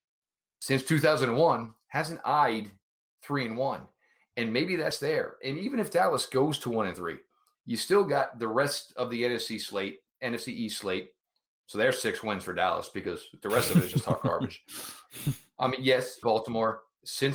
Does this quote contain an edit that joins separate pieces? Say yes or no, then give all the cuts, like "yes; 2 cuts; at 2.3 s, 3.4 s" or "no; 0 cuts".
yes; 1 cut; at 16.2 s